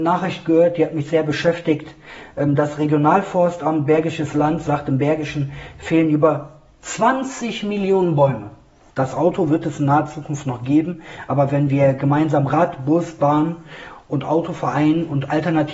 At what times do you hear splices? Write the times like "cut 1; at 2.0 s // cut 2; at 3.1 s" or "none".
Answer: cut 1; at 8.9 s